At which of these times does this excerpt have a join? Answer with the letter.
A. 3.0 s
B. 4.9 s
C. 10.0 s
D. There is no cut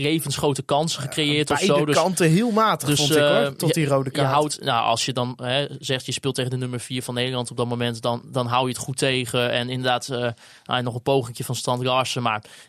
D